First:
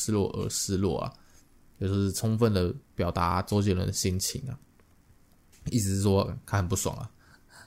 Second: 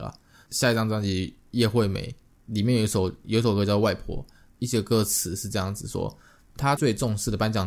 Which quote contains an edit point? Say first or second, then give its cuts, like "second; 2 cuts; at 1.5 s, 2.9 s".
second; 1 cut; at 6.8 s